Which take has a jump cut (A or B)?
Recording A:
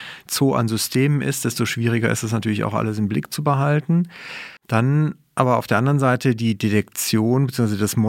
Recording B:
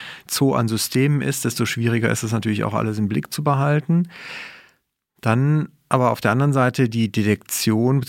A